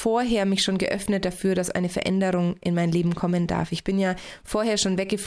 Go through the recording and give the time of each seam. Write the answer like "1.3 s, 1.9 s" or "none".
none